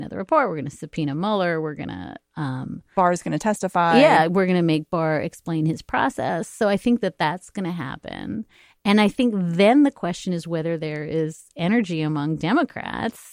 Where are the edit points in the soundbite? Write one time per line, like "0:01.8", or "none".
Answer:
none